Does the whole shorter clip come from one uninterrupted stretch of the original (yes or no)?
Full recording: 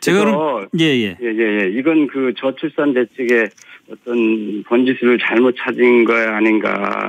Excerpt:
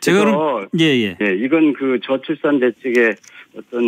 no